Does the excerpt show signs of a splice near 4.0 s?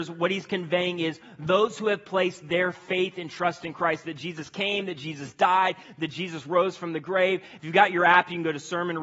no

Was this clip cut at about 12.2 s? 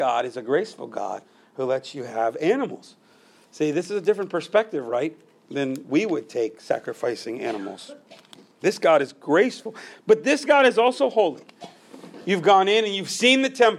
no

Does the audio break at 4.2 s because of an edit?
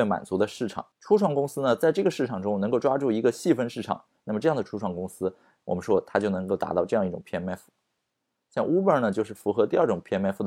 yes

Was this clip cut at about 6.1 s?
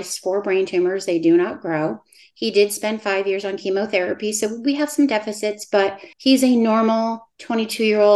yes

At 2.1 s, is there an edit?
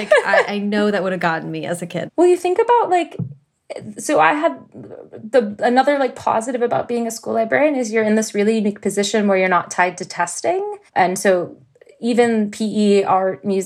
yes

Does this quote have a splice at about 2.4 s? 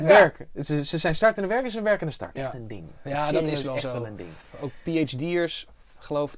yes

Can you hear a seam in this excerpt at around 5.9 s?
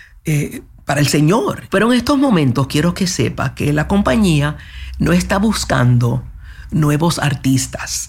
no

